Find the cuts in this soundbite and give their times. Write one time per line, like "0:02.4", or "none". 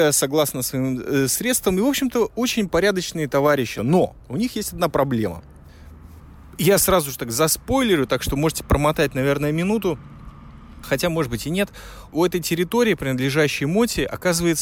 none